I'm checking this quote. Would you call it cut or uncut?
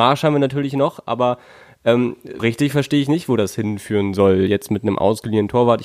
cut